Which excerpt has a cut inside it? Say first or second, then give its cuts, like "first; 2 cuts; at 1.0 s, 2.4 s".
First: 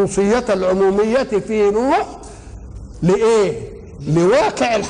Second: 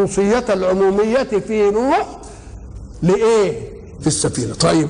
second; 1 cut; at 4.0 s